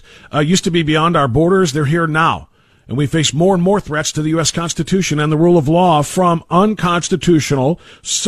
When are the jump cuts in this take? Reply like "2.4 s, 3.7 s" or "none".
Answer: none